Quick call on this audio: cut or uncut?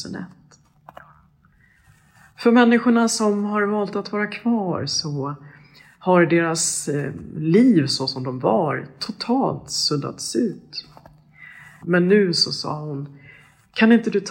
cut